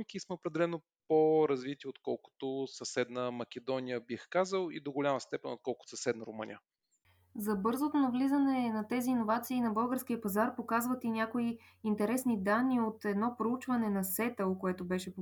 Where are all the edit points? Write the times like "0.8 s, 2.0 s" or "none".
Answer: none